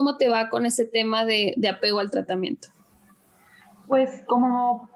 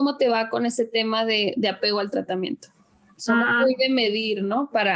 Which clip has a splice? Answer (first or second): second